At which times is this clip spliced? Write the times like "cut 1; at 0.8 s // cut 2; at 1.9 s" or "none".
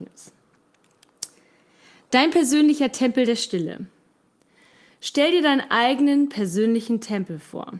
none